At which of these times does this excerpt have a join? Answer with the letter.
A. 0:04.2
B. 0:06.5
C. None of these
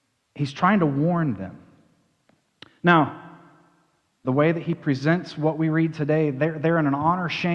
A